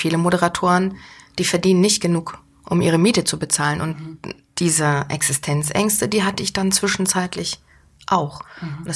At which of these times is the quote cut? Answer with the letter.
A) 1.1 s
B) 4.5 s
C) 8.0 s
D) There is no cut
D